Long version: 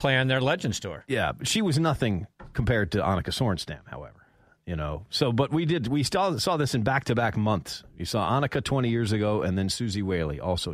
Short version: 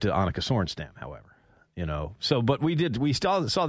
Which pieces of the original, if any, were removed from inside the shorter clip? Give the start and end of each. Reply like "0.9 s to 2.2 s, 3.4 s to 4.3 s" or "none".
none